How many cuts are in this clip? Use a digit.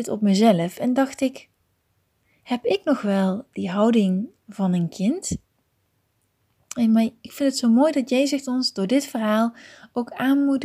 1